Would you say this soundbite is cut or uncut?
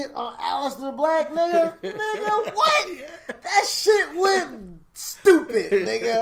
uncut